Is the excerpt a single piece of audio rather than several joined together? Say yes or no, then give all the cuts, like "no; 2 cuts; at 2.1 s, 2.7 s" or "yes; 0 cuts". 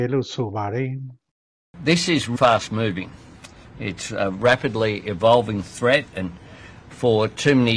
no; 1 cut; at 2.3 s